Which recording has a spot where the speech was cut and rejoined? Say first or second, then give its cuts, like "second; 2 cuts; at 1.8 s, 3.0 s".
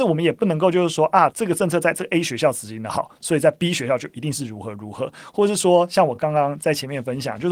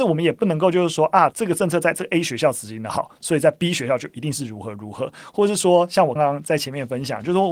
second; 1 cut; at 6.2 s